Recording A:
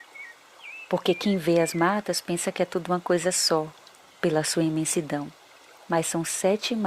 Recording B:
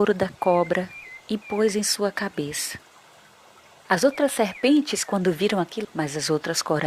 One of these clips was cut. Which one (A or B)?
B